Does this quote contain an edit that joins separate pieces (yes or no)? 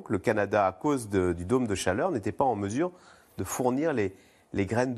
no